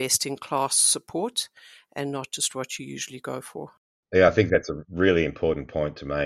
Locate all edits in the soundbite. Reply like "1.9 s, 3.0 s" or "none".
none